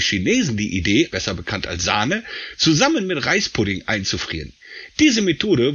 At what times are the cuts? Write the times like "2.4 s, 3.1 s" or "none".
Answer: 1.1 s